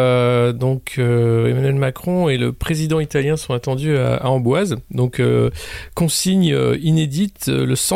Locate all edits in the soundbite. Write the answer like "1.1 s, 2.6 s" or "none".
none